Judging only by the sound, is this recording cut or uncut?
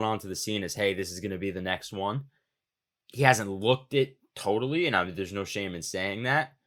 uncut